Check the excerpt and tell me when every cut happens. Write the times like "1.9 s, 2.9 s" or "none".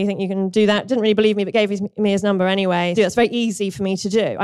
3.0 s